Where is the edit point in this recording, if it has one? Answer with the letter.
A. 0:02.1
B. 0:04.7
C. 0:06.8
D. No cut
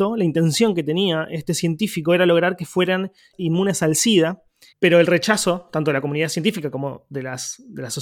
B